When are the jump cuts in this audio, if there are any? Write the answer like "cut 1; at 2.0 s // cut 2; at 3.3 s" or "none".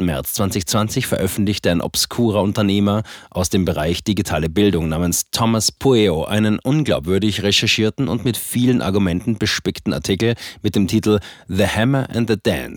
none

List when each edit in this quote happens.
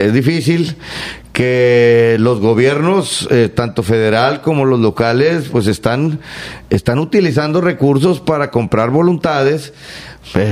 none

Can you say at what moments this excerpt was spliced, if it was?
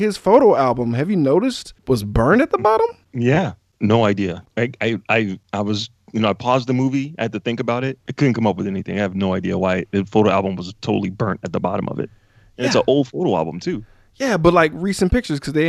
none

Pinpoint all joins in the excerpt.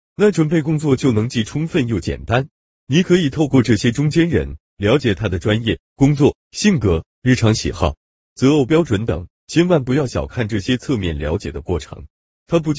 cut 1; at 8.2 s

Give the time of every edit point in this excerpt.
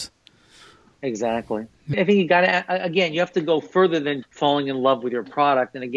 cut 1; at 1.9 s // cut 2; at 4.2 s

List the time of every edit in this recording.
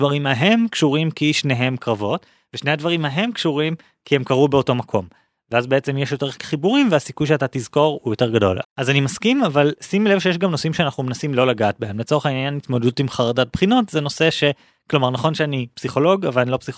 cut 1; at 8.6 s

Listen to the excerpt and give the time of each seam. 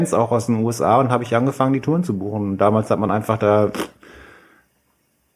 none

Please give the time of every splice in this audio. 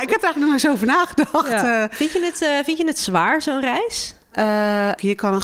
cut 1; at 4.3 s

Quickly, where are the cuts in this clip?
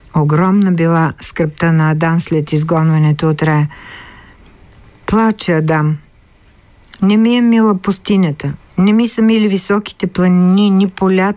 none

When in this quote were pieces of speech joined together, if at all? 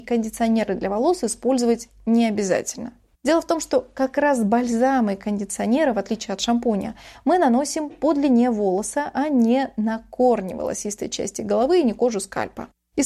cut 1; at 3.1 s

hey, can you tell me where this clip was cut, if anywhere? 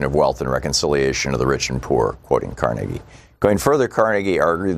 none

